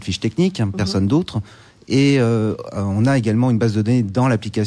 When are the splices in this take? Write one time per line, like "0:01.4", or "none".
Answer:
none